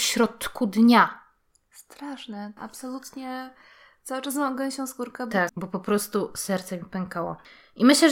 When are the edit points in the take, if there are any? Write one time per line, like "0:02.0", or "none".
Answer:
0:02.6
0:05.5